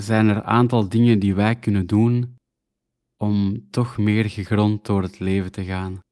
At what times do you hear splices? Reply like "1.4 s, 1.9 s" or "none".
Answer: none